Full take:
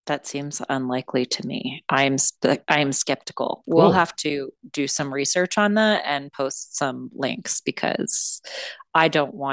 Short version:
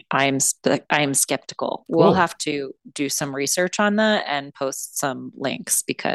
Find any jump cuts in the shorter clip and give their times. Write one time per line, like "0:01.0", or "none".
none